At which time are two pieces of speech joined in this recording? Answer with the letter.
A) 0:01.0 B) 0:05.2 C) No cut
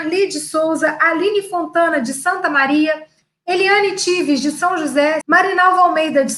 B